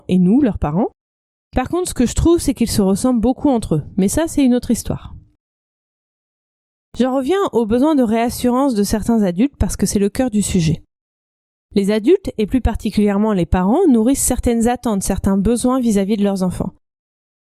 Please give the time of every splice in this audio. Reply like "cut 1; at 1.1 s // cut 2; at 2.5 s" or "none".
none